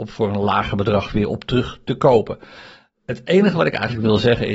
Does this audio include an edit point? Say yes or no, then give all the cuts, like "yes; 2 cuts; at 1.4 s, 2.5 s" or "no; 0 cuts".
no; 0 cuts